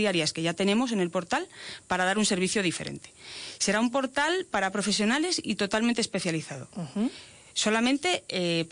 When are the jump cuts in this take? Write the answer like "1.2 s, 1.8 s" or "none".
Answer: none